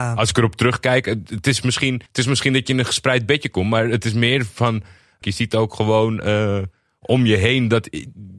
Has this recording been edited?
yes; 2 cuts; at 2.1 s, 5.2 s

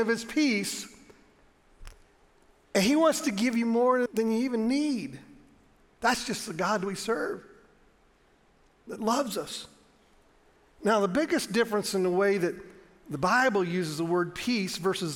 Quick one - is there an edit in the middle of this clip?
yes; 1 cut; at 4.1 s

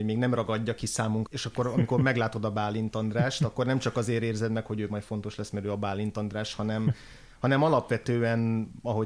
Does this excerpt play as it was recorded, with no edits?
no; 1 cut; at 1.3 s

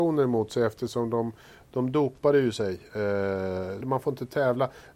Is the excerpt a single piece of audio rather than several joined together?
no; 1 cut; at 3.8 s

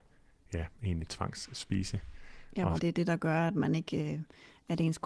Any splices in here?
yes; 1 cut; at 2.8 s

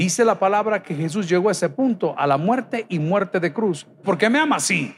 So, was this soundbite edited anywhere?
yes; 1 cut; at 4.0 s

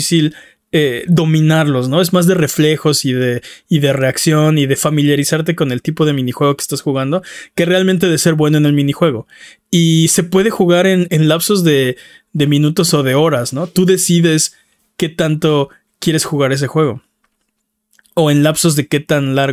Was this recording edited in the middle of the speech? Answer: yes; 1 cut; at 11.1 s

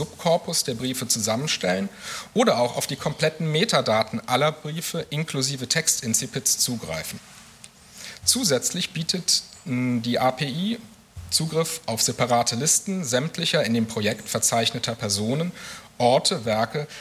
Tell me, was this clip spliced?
no; 0 cuts

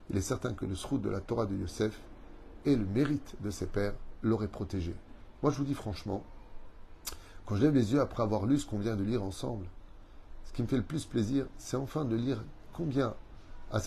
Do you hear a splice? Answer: yes; 1 cut; at 5.4 s

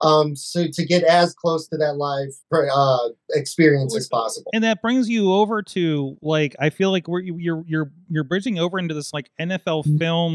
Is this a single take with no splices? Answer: no; 1 cut; at 2.4 s

